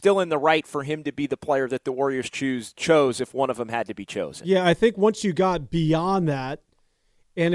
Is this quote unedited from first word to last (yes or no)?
yes